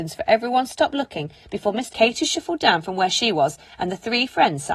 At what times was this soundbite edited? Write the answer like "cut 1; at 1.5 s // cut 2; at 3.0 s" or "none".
cut 1; at 1.9 s